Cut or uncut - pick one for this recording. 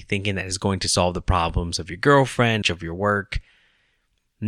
cut